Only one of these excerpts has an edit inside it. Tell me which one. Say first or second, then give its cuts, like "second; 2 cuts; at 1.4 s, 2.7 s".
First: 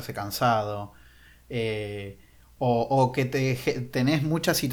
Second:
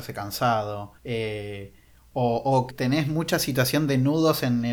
second; 2 cuts; at 1.0 s, 2.7 s